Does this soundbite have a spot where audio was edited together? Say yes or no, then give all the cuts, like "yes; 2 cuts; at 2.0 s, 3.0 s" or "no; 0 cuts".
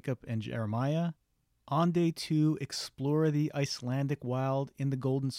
no; 0 cuts